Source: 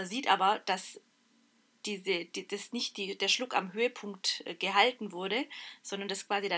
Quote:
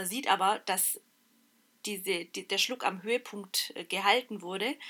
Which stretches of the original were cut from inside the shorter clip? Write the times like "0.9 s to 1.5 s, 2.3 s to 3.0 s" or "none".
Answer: 2.5 s to 3.2 s